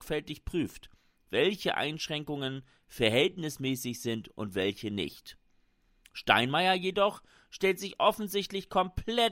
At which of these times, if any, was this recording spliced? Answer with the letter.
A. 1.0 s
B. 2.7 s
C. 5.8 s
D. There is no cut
D